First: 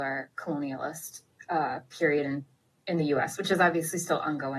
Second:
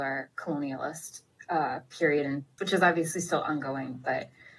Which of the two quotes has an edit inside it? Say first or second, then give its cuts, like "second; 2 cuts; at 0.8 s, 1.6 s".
second; 1 cut; at 2.6 s